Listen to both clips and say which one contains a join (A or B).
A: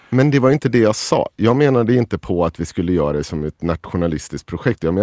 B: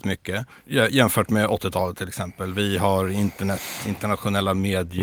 B